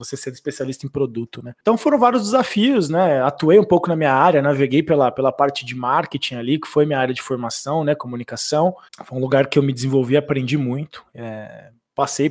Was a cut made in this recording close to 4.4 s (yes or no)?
no